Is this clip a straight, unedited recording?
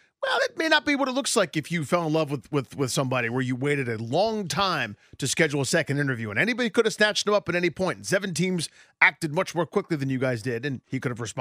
yes; 0 cuts

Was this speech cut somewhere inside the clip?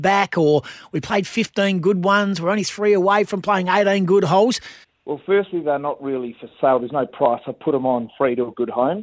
yes; 1 cut; at 4.8 s

